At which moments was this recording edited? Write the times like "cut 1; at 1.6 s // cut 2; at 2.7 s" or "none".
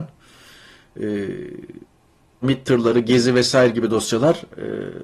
cut 1; at 2.4 s